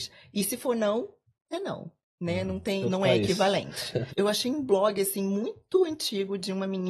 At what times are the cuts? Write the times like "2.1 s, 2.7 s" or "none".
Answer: 2.8 s, 4.1 s